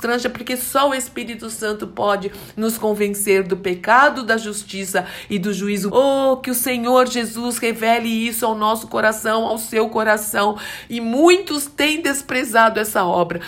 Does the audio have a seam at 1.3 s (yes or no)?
no